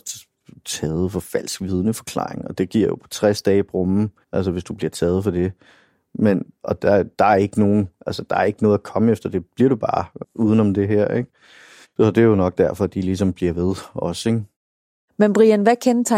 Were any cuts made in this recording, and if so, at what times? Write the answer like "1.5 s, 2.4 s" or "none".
4.2 s, 10.2 s, 11.8 s